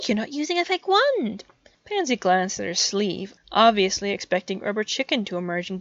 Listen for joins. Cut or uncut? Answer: uncut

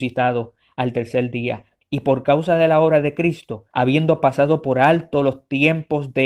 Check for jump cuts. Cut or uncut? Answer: cut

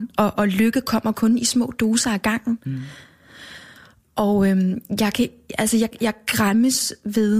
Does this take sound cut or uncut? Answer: cut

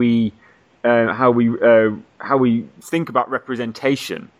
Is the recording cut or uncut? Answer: uncut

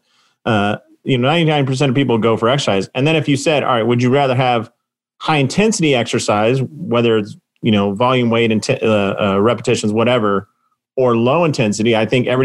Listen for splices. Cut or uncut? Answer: uncut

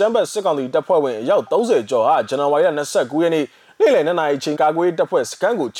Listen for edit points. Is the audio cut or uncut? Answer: cut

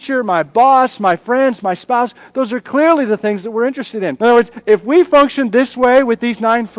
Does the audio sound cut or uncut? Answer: cut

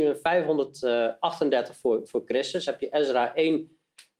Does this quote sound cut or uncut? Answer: uncut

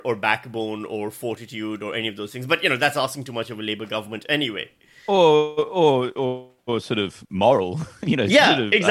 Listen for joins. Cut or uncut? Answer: uncut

